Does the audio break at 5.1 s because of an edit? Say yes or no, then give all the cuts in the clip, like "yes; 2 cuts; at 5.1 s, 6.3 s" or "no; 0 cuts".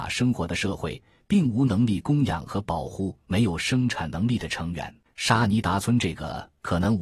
yes; 1 cut; at 5.1 s